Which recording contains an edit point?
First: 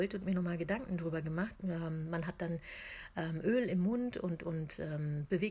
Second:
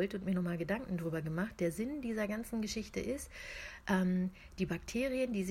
first; 1 cut; at 1.5 s

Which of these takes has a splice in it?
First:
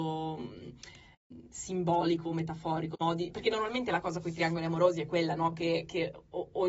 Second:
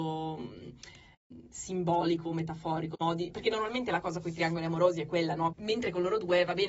second; 1 cut; at 5.5 s

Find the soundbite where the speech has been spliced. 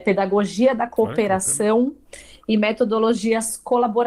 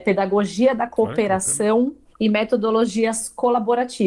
second; 1 cut; at 2.1 s

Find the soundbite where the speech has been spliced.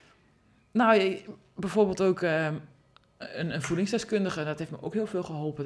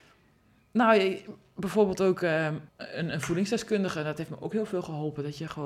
second; 1 cut; at 2.7 s

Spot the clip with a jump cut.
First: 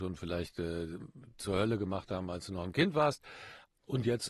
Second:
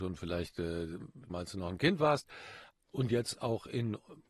second; 1 cut; at 1.3 s

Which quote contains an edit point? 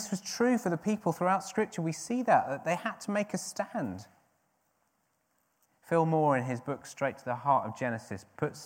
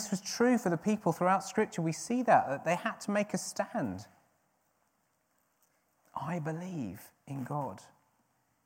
first; 1 cut; at 5.7 s

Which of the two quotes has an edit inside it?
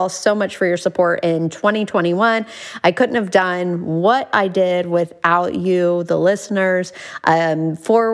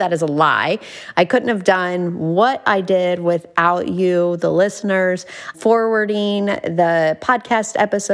second; 2 cuts; at 1.1 s, 5.5 s

